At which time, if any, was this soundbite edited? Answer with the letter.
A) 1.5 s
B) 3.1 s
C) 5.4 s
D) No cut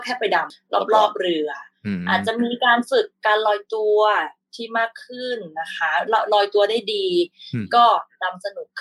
D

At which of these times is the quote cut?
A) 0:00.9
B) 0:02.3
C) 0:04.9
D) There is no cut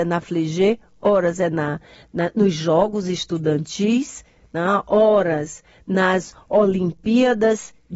D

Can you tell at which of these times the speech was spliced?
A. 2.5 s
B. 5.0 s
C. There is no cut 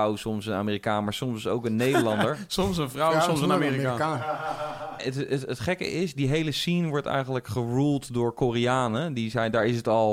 B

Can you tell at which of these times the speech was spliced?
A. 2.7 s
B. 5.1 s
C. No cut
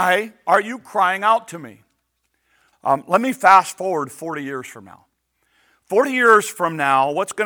A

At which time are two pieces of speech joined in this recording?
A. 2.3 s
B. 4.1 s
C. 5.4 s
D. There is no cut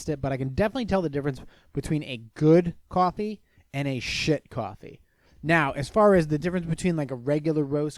C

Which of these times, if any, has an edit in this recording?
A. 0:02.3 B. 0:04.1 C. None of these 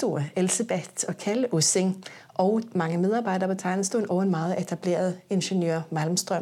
C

